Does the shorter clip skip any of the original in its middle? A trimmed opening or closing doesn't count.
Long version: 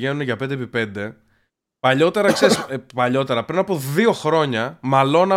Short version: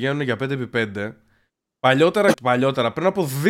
yes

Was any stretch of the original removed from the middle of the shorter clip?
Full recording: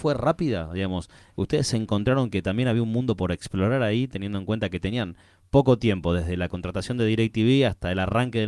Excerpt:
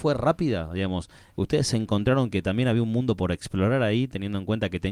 no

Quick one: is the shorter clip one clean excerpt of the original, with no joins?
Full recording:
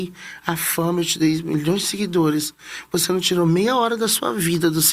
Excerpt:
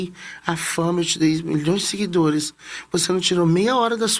yes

